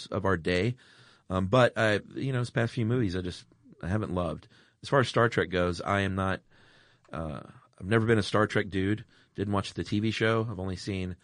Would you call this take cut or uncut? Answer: uncut